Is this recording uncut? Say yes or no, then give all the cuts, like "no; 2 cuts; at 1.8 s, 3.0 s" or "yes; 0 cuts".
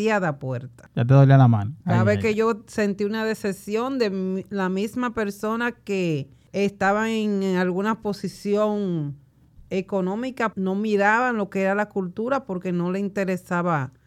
no; 2 cuts; at 1.8 s, 10.5 s